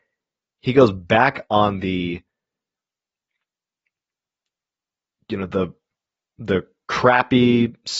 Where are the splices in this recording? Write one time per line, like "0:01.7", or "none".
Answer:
none